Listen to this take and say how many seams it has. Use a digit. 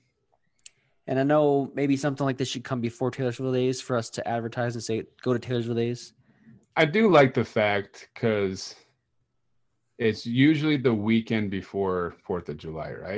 1